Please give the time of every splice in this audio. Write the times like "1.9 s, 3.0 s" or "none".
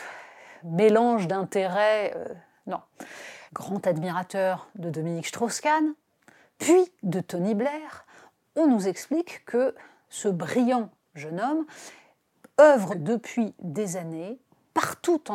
3.5 s, 12.9 s